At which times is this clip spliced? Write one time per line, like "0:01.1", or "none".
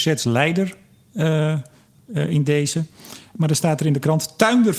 none